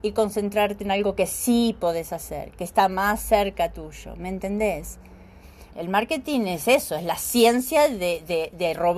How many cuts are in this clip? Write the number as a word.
one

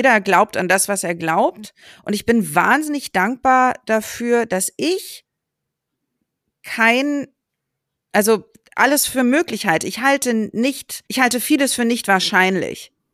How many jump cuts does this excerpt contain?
one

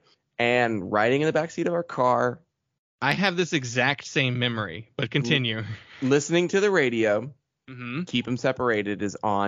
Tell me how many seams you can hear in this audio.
zero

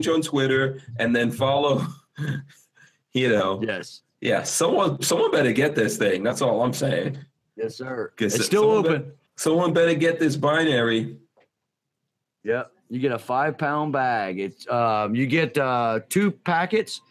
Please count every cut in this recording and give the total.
one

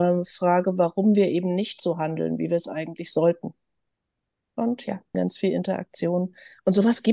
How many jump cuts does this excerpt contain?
one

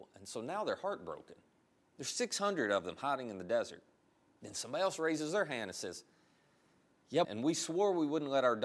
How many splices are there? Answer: two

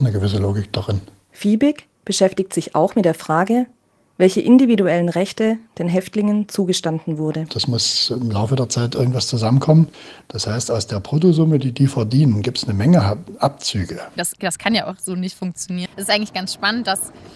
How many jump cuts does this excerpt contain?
three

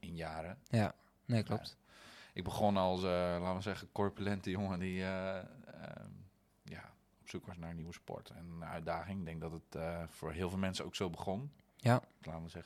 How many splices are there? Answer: zero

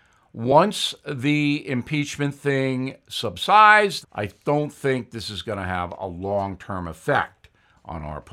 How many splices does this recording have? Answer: one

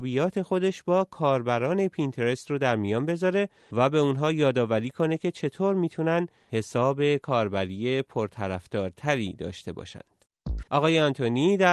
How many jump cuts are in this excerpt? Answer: one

